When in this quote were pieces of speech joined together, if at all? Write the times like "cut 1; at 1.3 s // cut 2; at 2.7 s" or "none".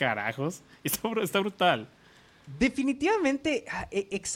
none